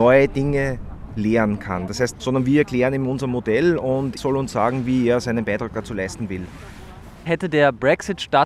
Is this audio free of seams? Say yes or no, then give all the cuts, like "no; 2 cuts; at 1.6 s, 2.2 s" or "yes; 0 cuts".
no; 2 cuts; at 2.1 s, 4.2 s